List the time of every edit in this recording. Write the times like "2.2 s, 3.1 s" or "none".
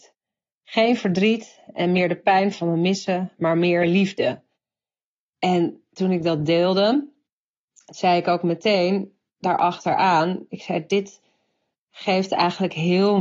none